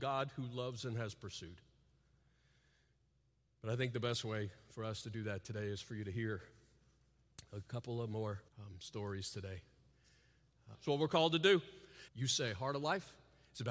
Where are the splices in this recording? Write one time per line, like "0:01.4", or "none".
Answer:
0:08.5
0:10.7
0:12.1